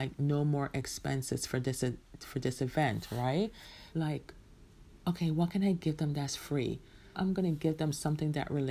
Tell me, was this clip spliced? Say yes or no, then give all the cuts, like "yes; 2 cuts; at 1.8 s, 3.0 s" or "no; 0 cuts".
yes; 3 cuts; at 3.9 s, 5.0 s, 7.1 s